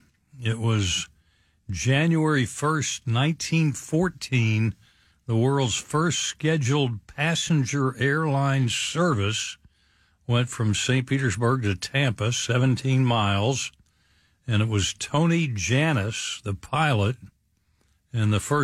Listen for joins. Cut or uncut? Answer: uncut